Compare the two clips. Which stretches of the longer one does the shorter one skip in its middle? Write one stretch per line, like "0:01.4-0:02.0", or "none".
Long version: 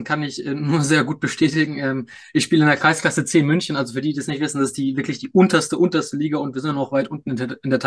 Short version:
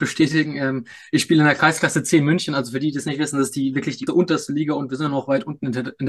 0:05.3-0:05.7